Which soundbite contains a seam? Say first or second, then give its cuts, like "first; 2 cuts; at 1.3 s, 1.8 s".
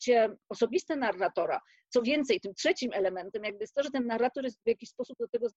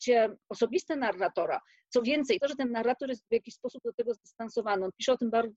second; 1 cut; at 2.4 s